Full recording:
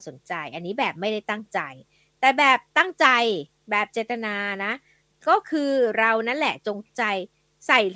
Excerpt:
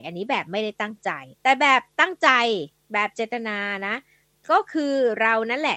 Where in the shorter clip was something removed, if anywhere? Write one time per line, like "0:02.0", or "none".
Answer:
0:01.3